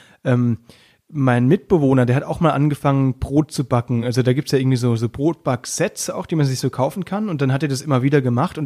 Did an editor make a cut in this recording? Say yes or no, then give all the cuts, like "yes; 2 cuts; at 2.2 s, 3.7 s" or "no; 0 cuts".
no; 0 cuts